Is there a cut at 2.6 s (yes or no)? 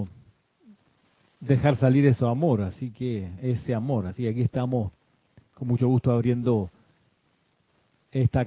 no